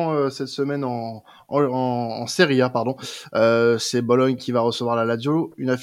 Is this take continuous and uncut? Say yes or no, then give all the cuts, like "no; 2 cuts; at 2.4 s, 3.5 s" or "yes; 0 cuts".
yes; 0 cuts